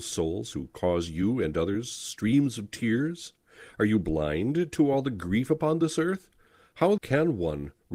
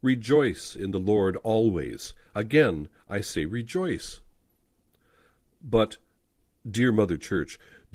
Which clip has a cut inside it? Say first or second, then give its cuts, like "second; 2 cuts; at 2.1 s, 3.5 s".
first; 1 cut; at 7.0 s